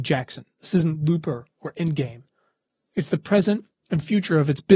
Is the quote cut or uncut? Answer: uncut